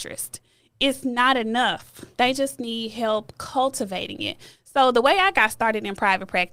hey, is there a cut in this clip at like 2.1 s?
yes; 1 cut; at 2.1 s

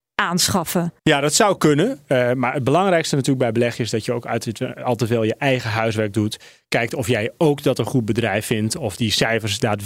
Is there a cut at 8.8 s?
no; 1 cut; at 1.0 s

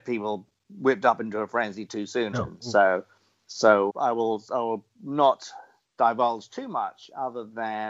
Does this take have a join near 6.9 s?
no; 2 cuts; at 2.3 s, 3.9 s

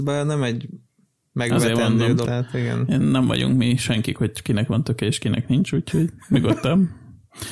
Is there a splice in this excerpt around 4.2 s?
yes; 2 cuts; at 2.2 s, 4.2 s

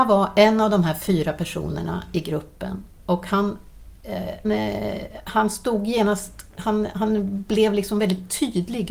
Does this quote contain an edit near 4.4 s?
yes; 1 cut; at 4.4 s

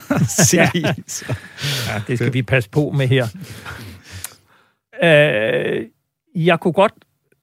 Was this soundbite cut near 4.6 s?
no; 0 cuts

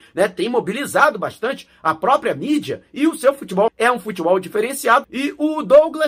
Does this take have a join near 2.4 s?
no; 2 cuts; at 3.7 s, 5.0 s

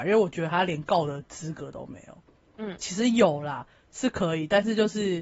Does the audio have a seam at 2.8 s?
yes; 1 cut; at 2.8 s

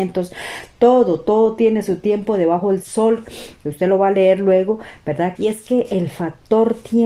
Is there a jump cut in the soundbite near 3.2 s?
yes; 2 cuts; at 3.2 s, 5.3 s

